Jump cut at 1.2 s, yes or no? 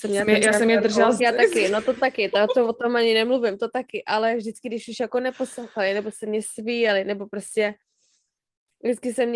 yes